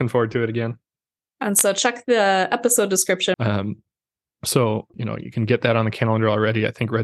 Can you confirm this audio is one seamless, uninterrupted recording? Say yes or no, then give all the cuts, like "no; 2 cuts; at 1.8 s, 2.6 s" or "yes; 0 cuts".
no; 2 cuts; at 3.3 s, 4.9 s